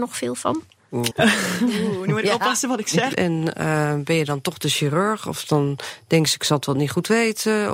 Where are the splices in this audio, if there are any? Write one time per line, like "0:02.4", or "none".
0:01.1
0:03.1